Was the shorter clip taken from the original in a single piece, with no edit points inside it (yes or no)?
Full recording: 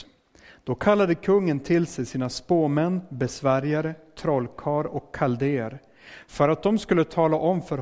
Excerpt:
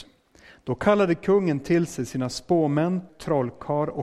no